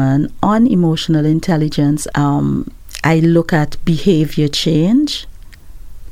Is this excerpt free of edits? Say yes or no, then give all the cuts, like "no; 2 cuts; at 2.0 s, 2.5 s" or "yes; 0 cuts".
no; 1 cut; at 2.1 s